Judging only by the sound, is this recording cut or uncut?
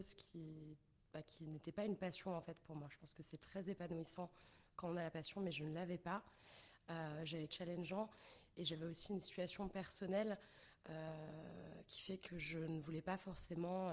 cut